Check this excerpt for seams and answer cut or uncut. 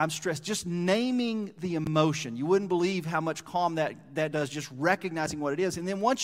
uncut